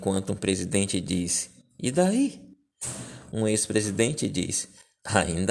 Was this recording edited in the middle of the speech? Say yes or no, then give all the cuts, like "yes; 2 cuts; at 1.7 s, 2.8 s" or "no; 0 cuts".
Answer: no; 0 cuts